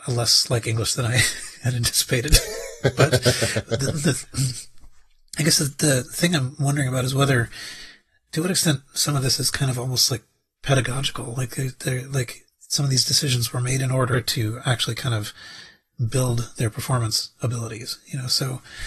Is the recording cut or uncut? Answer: uncut